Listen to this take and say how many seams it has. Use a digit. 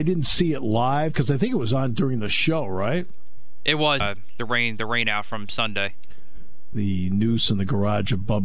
2